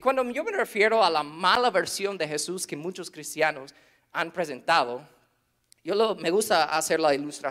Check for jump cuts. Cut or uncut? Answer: uncut